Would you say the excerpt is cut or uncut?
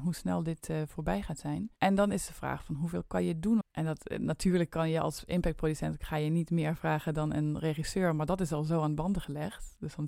cut